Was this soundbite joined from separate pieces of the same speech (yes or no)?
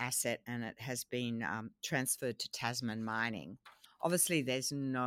yes